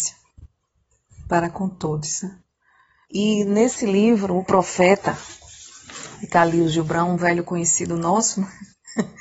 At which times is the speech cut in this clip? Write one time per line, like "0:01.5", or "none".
0:03.1